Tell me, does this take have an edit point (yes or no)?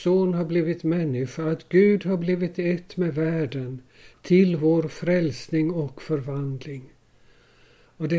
no